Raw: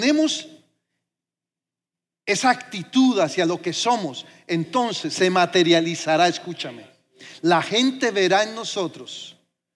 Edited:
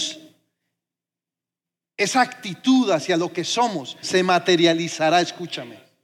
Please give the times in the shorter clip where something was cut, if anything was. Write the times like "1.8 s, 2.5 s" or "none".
4.0 s